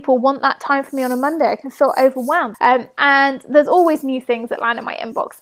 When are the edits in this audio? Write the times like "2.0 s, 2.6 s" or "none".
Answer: 2.5 s